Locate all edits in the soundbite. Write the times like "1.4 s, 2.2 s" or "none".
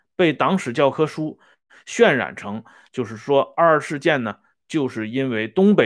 none